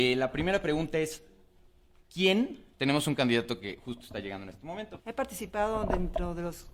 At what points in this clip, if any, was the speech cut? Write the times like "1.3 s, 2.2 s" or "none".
2.7 s, 5.0 s